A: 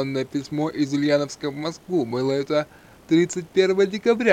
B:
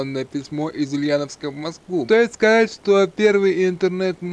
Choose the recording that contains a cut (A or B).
B